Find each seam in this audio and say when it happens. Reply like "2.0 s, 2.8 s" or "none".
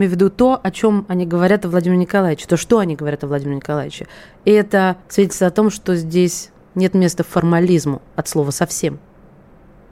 5.0 s, 8.1 s